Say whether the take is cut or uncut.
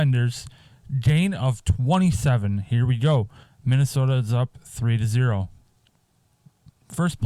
cut